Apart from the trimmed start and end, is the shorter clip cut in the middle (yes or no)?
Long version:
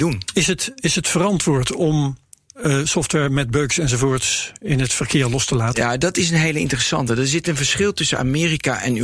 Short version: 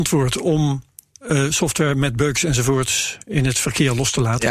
no